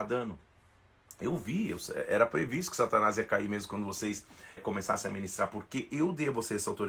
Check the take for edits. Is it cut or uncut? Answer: cut